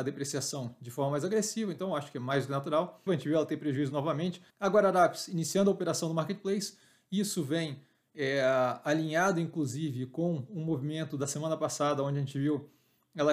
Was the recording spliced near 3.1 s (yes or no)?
yes